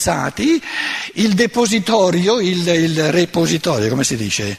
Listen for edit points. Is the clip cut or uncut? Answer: uncut